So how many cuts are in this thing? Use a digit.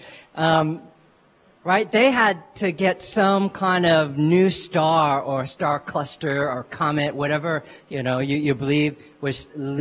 0